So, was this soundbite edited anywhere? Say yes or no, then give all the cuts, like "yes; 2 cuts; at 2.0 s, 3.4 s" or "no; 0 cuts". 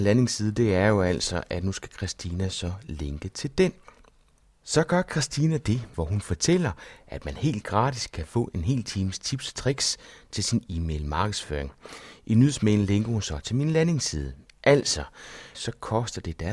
yes; 2 cuts; at 5.9 s, 15.5 s